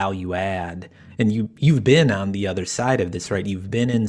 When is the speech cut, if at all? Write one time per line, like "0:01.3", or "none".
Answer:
none